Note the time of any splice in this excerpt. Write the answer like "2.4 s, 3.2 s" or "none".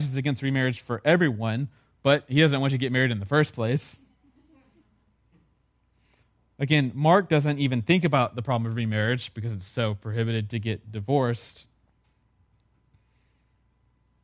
none